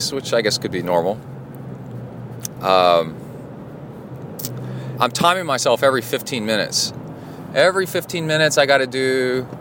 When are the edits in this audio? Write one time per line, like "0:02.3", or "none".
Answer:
0:02.6
0:05.0